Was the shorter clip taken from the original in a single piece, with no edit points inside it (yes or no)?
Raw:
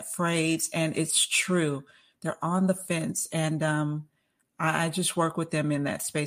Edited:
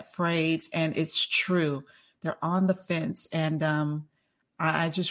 yes